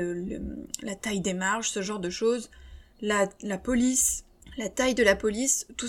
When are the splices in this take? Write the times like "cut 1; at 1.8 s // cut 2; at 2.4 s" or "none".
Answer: none